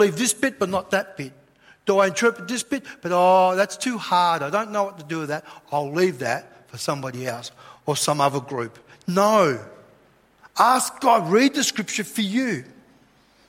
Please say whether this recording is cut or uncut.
uncut